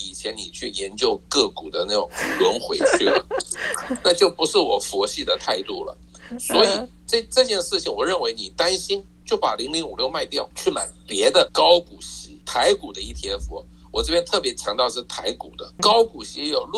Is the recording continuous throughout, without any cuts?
yes; 0 cuts

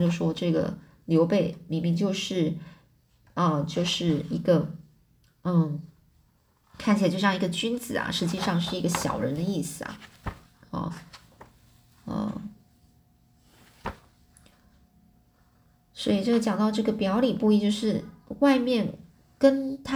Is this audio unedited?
yes; 0 cuts

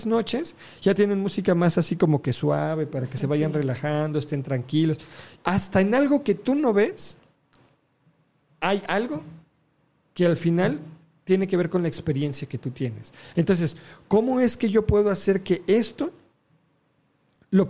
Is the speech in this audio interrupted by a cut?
yes; 1 cut; at 5.4 s

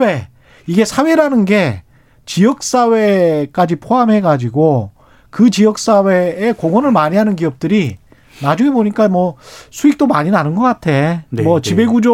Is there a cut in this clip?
no; 0 cuts

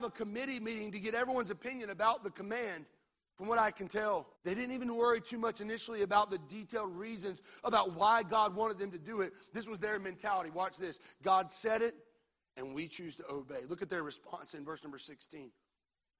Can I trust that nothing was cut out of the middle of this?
no; 1 cut; at 4.3 s

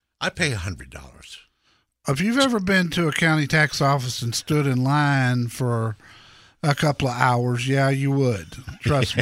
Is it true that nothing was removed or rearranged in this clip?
yes; 0 cuts

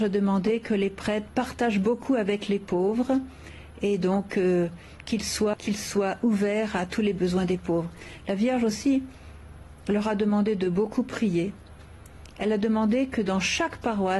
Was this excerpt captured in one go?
no; 1 cut; at 5.5 s

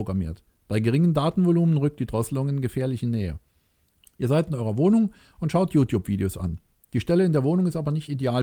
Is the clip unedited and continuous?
no; 1 cut; at 4.1 s

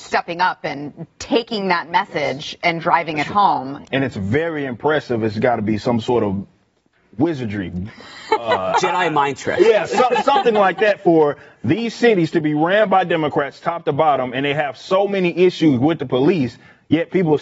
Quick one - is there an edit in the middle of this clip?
yes; 1 cut; at 3.8 s

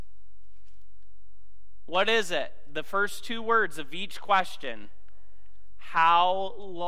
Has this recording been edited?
no; 0 cuts

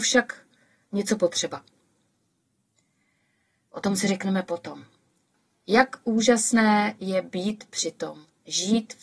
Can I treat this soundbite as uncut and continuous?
yes; 0 cuts

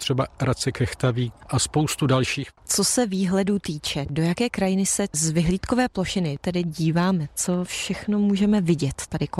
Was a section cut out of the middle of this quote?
no; 0 cuts

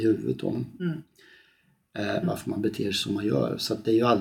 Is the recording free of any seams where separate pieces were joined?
no; 1 cut; at 2.2 s

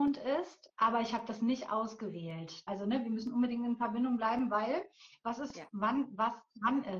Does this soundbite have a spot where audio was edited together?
yes; 2 cuts; at 2.7 s, 5.5 s

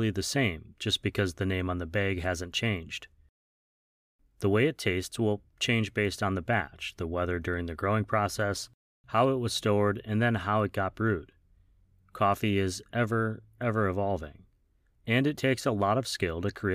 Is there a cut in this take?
no; 0 cuts

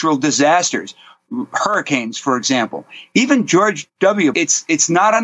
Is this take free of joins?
no; 1 cut; at 4.3 s

